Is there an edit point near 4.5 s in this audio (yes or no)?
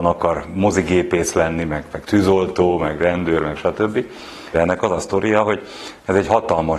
yes